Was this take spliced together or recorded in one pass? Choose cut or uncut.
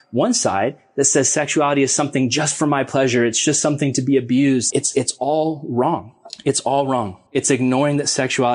cut